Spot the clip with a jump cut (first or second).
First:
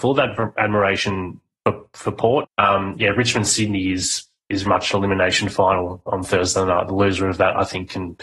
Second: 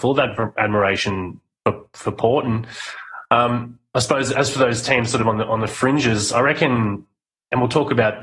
first